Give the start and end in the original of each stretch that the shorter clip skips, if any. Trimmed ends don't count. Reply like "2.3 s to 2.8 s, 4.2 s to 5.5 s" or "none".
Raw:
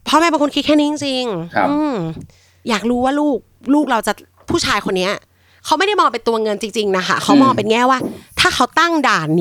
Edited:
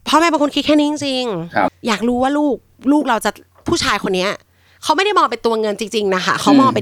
1.7 s to 2.5 s